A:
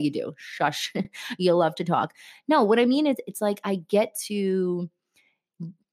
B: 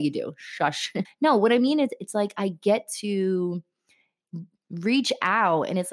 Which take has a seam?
B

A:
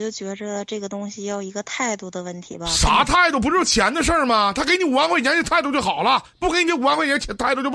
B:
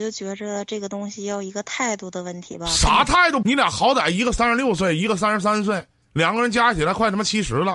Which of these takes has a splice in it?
B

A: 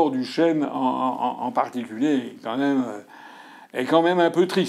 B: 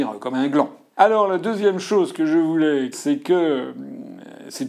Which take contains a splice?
B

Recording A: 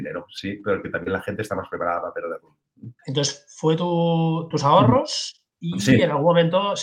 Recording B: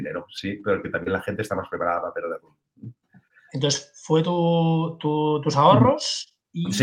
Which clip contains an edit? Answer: A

